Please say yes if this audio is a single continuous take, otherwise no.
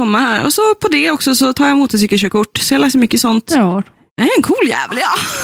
yes